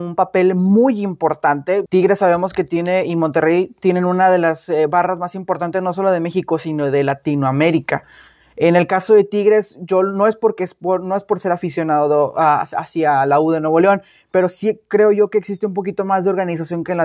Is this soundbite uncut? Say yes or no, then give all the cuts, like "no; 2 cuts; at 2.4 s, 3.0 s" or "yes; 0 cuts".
no; 1 cut; at 1.9 s